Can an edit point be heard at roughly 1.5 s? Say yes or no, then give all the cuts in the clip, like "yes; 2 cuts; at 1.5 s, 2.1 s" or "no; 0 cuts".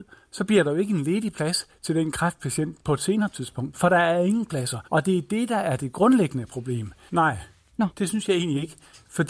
no; 2 cuts; at 4.9 s, 7.1 s